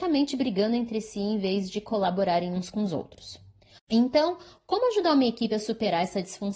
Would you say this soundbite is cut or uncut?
cut